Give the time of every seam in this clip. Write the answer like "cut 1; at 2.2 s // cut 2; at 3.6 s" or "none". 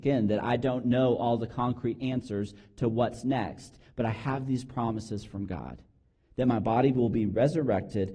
none